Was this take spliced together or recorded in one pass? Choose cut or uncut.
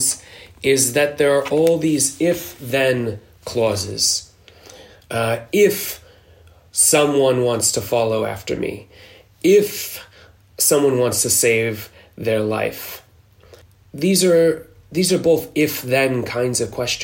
uncut